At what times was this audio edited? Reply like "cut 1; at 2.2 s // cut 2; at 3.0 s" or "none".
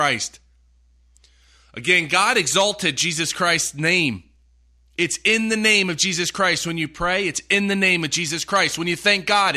none